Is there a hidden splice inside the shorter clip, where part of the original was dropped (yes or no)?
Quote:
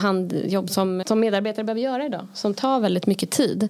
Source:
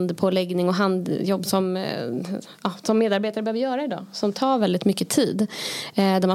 yes